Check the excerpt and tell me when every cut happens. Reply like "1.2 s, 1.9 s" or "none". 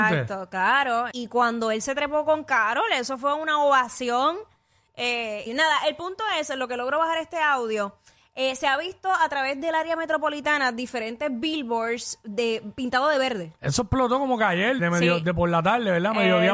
1.1 s, 5.5 s, 14.8 s